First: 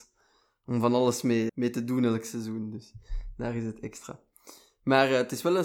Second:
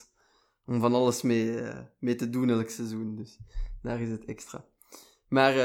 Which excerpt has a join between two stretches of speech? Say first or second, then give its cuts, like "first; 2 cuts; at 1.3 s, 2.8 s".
first; 1 cut; at 1.5 s